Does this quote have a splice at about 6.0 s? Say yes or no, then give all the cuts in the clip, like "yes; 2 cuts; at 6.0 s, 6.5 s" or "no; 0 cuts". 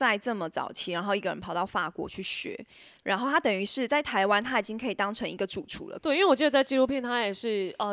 yes; 1 cut; at 6.0 s